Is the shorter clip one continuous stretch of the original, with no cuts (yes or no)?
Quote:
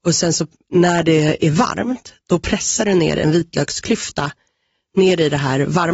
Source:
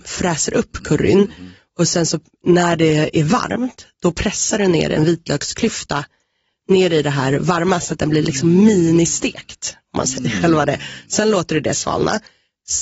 yes